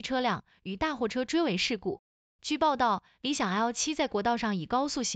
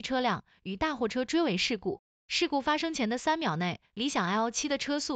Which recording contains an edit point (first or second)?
second